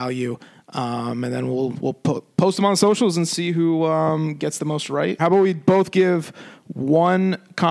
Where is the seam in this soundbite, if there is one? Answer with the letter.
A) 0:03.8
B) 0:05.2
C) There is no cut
B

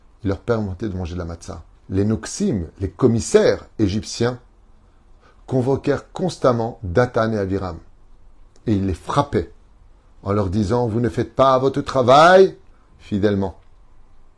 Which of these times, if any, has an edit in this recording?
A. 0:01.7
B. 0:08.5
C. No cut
A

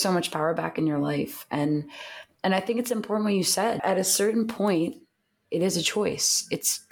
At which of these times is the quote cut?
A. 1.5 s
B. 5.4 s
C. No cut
B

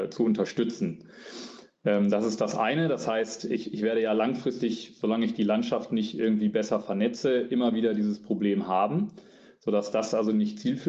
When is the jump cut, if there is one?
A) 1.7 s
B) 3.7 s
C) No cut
C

